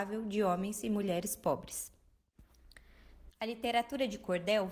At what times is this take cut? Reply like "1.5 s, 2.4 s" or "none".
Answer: 3.3 s